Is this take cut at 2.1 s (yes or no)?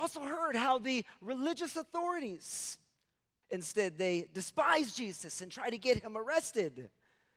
no